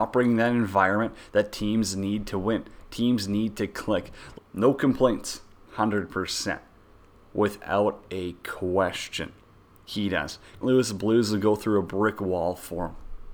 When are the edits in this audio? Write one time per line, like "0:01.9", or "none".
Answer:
0:04.3
0:05.7
0:10.6